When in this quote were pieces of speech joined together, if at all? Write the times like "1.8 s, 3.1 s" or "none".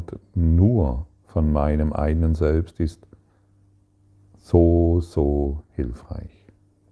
none

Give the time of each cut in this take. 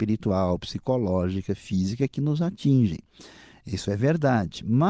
none

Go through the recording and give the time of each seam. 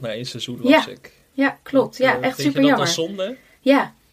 none

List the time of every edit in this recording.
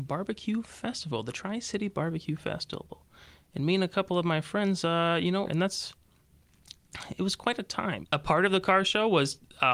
5.5 s, 8.0 s

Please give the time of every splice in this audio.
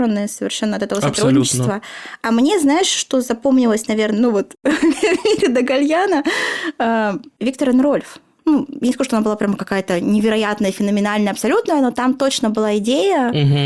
none

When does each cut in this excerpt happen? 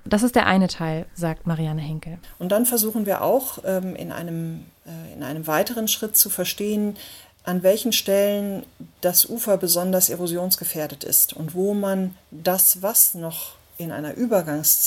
none

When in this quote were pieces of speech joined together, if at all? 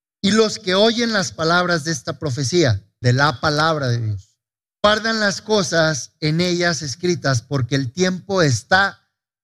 3.0 s

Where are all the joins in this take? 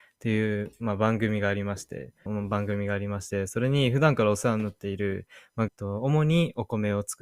2.3 s, 5.7 s

